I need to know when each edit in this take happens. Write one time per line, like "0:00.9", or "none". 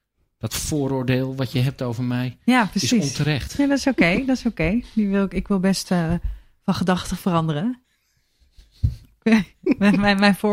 none